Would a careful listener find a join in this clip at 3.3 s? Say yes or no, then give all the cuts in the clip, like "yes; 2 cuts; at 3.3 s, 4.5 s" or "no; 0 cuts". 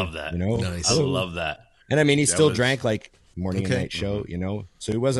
yes; 1 cut; at 3.3 s